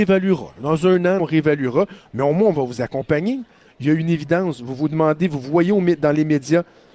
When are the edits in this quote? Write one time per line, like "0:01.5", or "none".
0:01.2
0:03.6